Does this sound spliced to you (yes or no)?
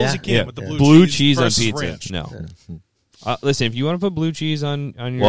no